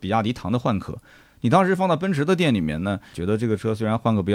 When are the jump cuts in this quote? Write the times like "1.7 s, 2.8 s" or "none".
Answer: 3.1 s